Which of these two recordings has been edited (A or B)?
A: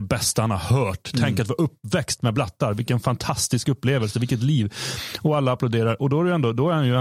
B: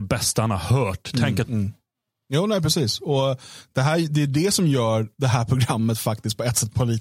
B